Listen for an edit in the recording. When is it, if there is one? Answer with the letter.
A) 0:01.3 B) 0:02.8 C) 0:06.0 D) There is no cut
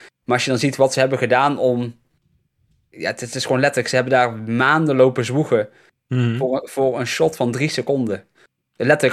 D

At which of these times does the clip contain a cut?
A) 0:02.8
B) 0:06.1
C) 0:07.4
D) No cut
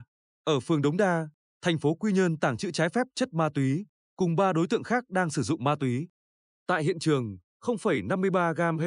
C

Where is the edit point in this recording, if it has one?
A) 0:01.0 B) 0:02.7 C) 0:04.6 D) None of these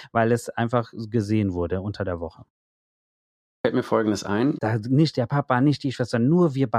C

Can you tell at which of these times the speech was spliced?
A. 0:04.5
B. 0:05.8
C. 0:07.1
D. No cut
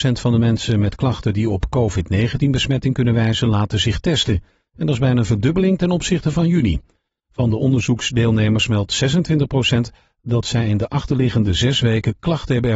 D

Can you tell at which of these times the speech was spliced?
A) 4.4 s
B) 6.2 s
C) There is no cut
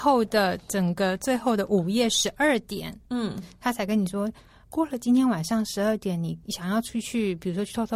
C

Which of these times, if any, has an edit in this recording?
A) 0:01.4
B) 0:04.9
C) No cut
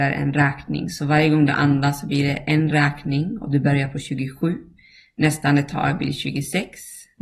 C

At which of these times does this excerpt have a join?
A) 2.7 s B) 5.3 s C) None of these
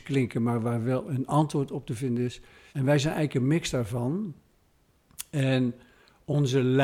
A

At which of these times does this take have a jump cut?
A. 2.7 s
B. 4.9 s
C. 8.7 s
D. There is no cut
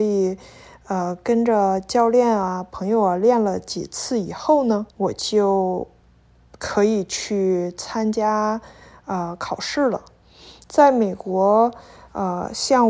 B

